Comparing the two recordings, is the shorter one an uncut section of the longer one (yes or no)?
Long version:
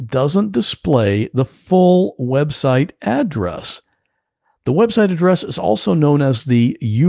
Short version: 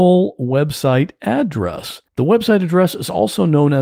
no